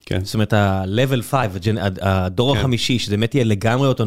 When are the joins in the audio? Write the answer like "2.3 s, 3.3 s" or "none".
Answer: none